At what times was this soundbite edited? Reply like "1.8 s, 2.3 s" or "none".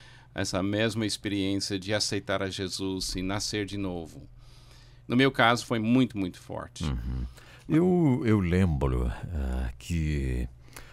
none